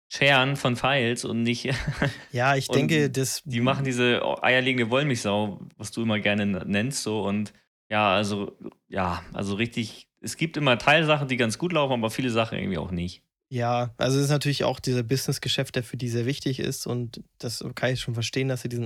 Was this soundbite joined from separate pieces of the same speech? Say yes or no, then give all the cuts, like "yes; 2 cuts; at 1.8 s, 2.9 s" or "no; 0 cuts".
no; 0 cuts